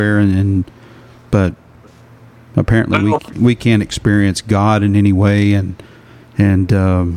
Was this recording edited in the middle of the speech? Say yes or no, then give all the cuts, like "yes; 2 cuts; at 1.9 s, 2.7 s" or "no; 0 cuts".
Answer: no; 0 cuts